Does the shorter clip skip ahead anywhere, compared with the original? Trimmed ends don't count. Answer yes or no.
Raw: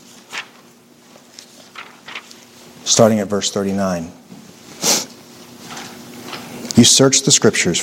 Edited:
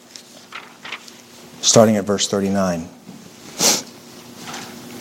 no